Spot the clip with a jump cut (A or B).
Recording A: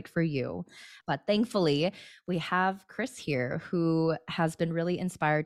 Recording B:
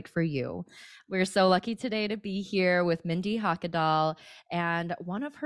A